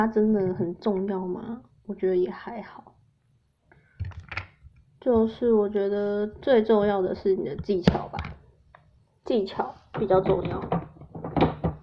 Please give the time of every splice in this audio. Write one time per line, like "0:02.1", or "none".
none